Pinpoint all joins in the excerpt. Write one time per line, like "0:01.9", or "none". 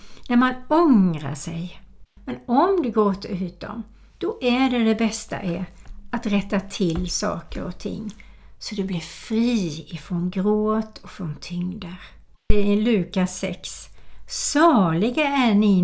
0:02.2